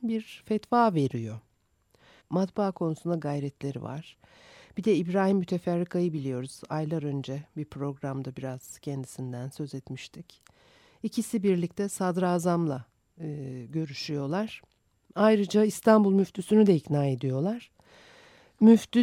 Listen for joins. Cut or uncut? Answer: cut